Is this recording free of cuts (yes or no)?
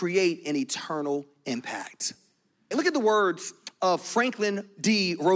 no